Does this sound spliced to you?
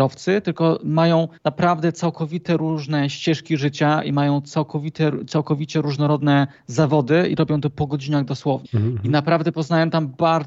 yes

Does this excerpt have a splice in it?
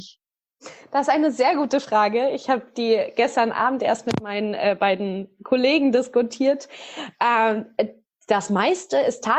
no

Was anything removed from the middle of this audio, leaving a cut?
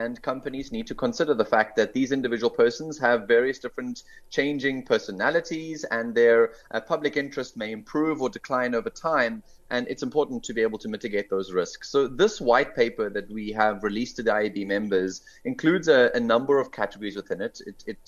no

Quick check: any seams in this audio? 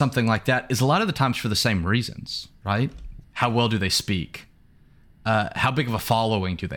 yes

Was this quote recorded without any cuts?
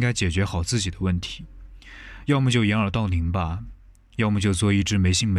yes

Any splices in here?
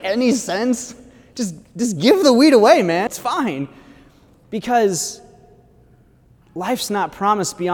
yes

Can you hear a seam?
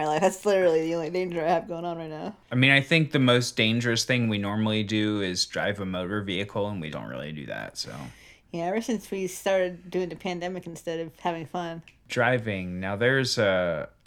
yes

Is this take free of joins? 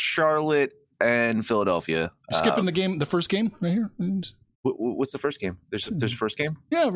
yes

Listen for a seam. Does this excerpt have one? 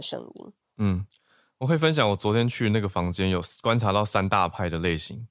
no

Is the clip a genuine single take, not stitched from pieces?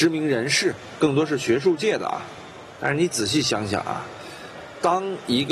yes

